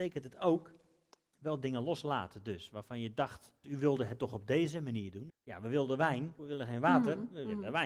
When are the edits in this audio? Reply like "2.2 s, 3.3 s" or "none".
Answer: 3.6 s, 5.3 s, 6.4 s